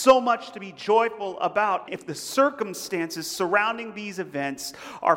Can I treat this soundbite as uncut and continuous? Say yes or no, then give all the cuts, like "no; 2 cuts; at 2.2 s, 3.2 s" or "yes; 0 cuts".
no; 1 cut; at 1.9 s